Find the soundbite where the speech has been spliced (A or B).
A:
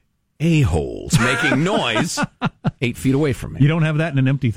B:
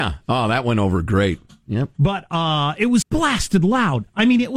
B